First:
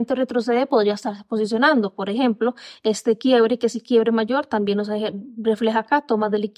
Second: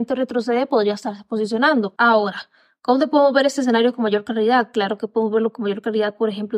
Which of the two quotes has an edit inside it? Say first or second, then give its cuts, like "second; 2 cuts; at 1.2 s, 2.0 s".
second; 1 cut; at 2.0 s